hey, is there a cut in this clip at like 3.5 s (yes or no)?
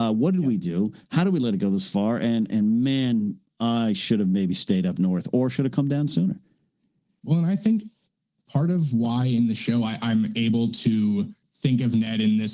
no